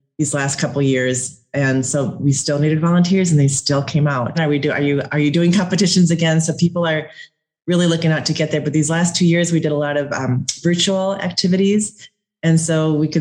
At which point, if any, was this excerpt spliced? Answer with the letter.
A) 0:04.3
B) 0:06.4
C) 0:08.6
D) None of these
A